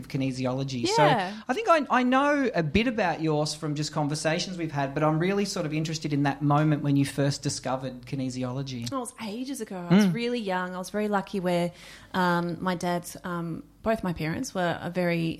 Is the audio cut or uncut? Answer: uncut